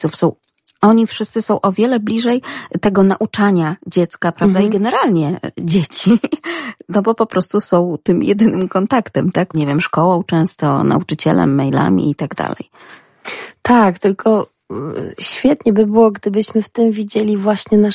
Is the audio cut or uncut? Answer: cut